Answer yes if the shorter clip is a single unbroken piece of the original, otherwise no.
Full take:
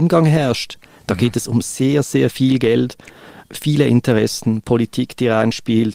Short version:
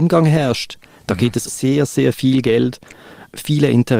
no